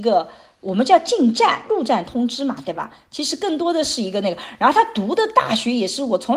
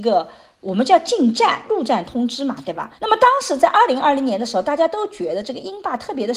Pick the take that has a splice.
second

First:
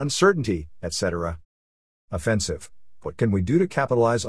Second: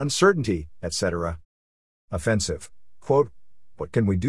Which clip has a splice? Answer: first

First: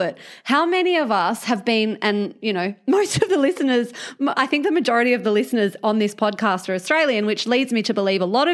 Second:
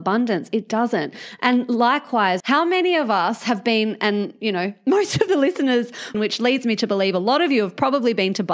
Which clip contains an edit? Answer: second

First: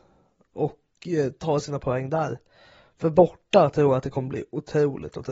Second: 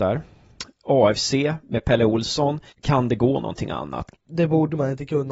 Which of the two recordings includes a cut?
second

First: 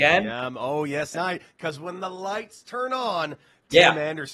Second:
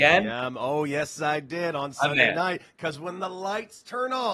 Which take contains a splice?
first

